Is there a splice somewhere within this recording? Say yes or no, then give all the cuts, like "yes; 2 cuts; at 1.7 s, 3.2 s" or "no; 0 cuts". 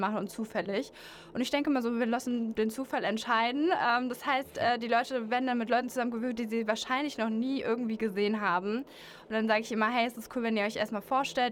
no; 0 cuts